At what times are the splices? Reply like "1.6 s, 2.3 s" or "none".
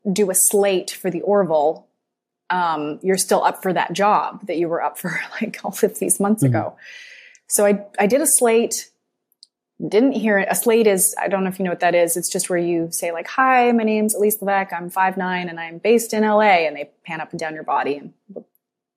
none